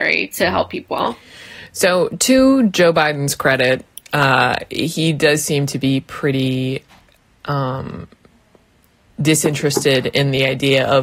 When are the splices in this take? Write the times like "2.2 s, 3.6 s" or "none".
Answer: none